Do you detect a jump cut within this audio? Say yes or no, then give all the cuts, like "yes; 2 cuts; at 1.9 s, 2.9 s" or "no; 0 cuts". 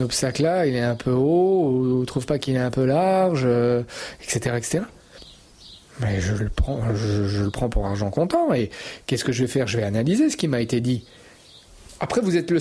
no; 0 cuts